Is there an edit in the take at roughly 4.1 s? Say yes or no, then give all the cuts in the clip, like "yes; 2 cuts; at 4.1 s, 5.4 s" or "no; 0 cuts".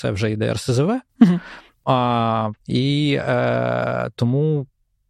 no; 1 cut; at 2.5 s